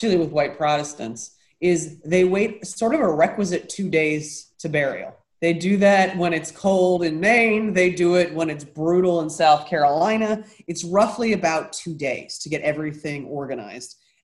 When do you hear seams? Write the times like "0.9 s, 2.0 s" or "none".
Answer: none